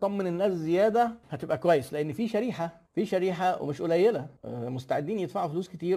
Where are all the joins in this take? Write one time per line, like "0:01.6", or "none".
0:04.4

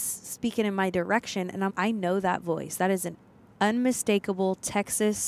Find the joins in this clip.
0:01.7

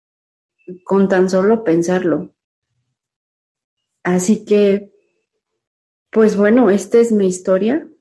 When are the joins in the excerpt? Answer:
none

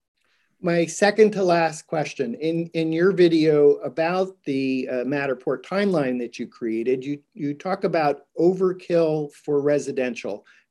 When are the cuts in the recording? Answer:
none

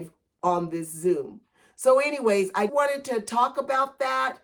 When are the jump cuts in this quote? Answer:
0:02.7

